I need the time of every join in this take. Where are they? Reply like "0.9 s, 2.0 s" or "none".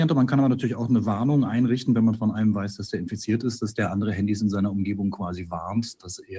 none